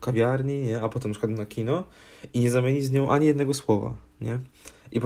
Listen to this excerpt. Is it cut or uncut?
uncut